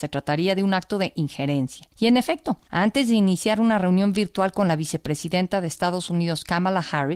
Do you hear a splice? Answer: yes; 1 cut; at 2.7 s

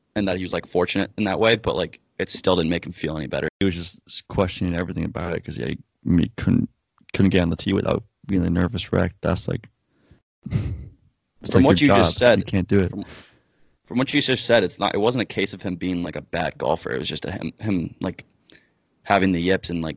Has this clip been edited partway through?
no; 0 cuts

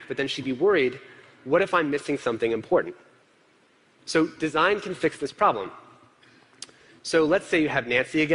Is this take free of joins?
yes; 0 cuts

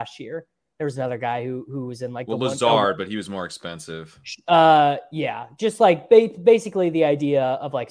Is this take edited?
no; 0 cuts

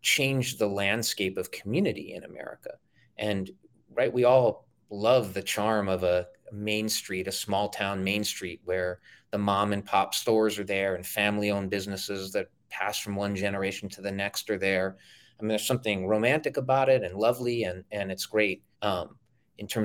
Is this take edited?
yes; 1 cut; at 18.7 s

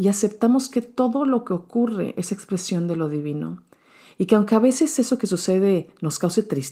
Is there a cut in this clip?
no; 0 cuts

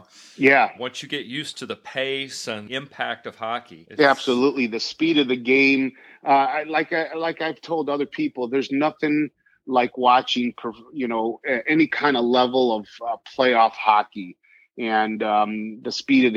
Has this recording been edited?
no; 0 cuts

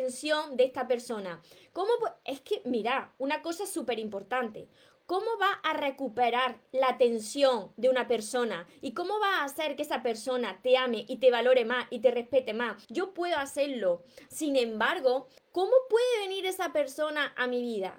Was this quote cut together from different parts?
yes; 3 cuts; at 12.8 s, 14.3 s, 15.4 s

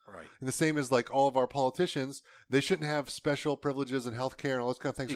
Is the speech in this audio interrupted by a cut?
no; 0 cuts

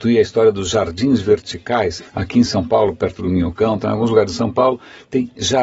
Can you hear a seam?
yes; 1 cut; at 2.0 s

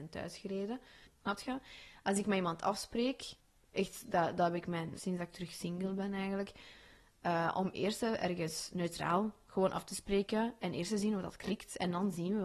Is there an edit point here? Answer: yes; 2 cuts; at 1.1 s, 4.9 s

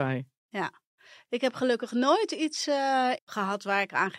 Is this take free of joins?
no; 1 cut; at 3.2 s

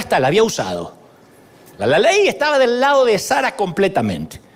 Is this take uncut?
no; 1 cut; at 1.8 s

